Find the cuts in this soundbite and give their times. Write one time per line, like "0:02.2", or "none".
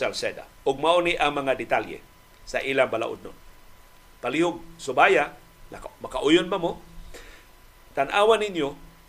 none